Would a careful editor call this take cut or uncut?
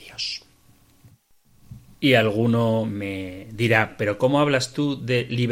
uncut